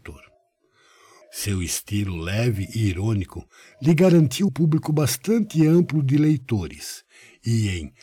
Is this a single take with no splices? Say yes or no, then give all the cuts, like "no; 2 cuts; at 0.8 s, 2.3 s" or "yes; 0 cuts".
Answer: no; 2 cuts; at 1.2 s, 4.5 s